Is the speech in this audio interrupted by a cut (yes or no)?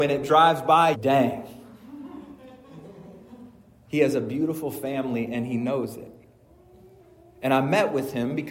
yes